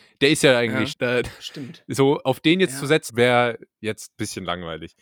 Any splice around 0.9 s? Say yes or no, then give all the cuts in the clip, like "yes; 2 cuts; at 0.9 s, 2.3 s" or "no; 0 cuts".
yes; 2 cuts; at 0.9 s, 3.1 s